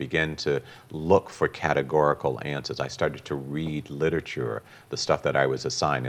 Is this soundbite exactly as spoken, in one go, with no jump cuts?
yes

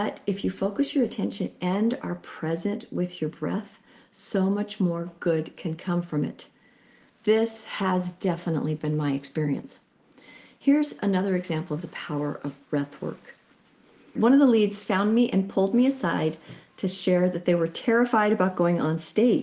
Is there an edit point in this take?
yes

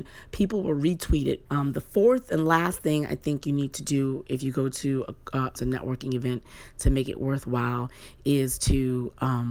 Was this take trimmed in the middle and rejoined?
yes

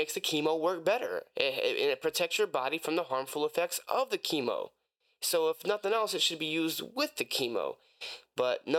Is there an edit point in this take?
no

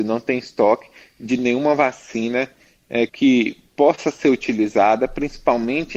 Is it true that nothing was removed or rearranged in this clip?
no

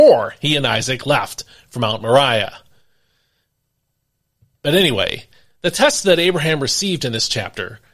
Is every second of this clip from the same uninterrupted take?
yes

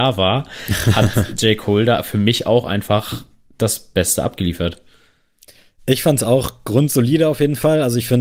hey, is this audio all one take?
yes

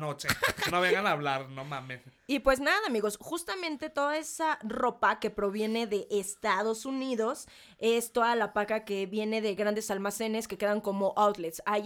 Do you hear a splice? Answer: no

